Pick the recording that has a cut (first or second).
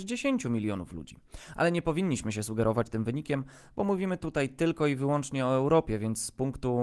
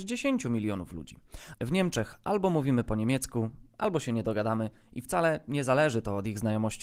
second